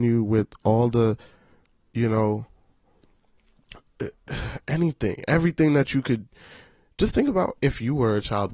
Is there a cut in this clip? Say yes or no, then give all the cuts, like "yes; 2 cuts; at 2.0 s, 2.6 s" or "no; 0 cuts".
no; 0 cuts